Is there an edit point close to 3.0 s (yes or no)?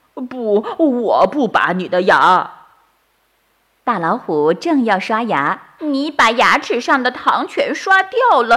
yes